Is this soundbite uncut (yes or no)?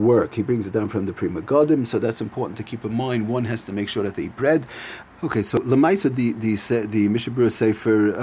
no